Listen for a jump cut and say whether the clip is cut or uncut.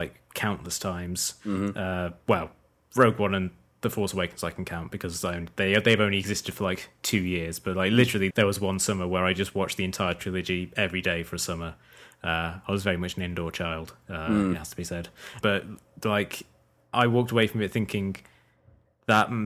cut